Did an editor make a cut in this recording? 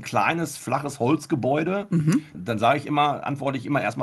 yes; 1 cut; at 2.3 s

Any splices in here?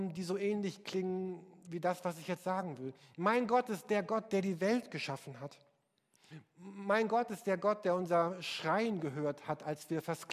no; 0 cuts

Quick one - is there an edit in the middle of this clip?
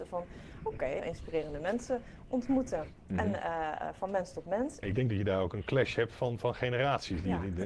yes; 2 cuts; at 1.0 s, 4.8 s

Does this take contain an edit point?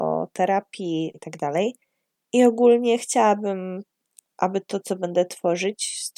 yes; 1 cut; at 1.1 s

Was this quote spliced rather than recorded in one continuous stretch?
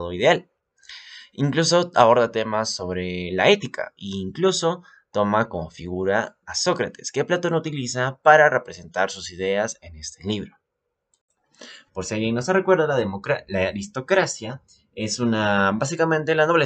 yes; 1 cut; at 11.9 s

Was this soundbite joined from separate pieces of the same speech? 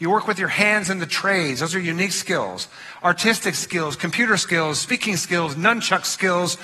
no; 0 cuts

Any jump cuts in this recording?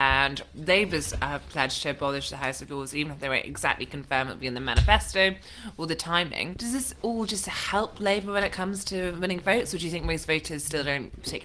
no; 0 cuts

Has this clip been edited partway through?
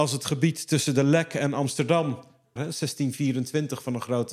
yes; 1 cut; at 2.6 s

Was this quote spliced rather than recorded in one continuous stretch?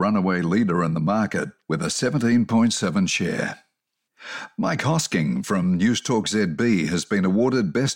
no; 0 cuts

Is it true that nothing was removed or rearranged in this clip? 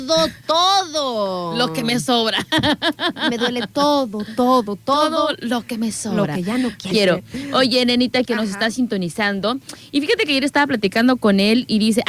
no; 2 cuts; at 6.9 s, 8.3 s

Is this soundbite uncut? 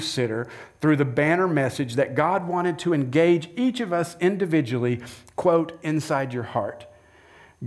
yes; 0 cuts

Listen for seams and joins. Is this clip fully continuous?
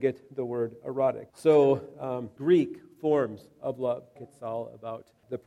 no; 3 cuts; at 1.3 s, 2.4 s, 4.2 s

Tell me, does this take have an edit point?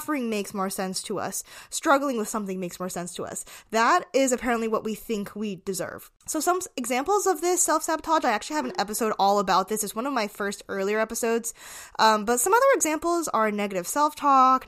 no; 0 cuts

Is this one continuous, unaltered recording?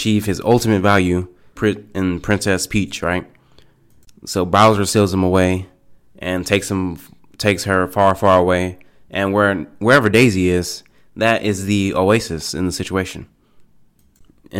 no; 1 cut; at 1.6 s

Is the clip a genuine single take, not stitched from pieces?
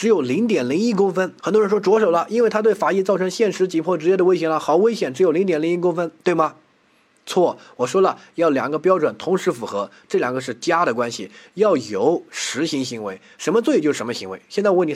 no; 1 cut; at 1.4 s

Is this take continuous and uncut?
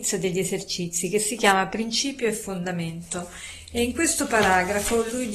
yes; 0 cuts

